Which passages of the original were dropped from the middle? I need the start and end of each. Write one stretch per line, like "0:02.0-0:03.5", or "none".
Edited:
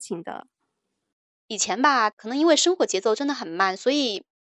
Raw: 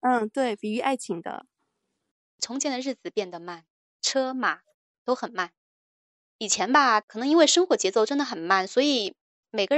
0:02.2-0:06.2